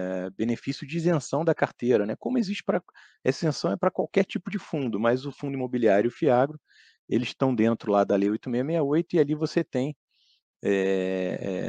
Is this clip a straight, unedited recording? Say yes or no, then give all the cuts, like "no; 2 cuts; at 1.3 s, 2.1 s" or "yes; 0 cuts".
yes; 0 cuts